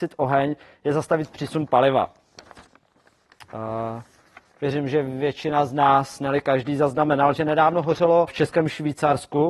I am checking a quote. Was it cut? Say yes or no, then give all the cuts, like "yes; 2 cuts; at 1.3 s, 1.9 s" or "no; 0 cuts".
yes; 1 cut; at 8.3 s